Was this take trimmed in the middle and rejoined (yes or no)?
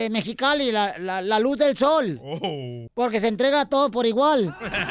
yes